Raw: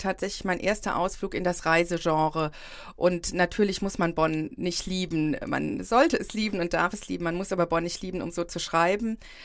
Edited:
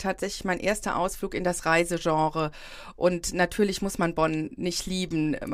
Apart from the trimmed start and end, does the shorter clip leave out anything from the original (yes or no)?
no